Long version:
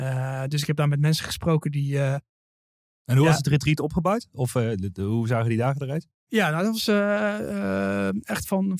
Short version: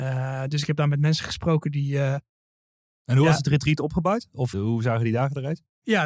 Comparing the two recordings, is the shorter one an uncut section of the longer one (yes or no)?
no